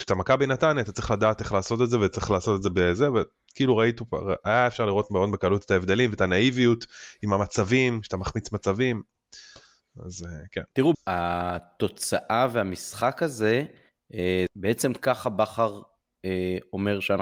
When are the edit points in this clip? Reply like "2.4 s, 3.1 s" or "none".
10.9 s, 14.5 s